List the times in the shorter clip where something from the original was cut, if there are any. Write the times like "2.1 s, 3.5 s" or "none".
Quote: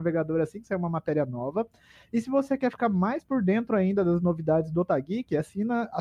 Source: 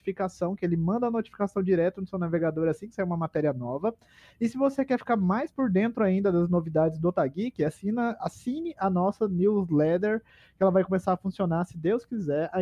none